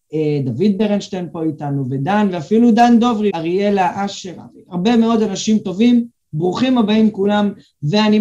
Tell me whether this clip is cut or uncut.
cut